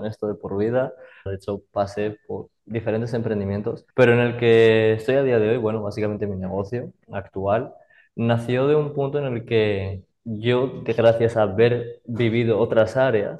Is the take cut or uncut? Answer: cut